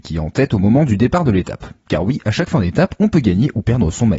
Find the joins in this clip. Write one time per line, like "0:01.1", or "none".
none